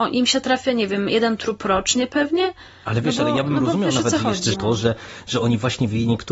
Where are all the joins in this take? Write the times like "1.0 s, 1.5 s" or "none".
4.5 s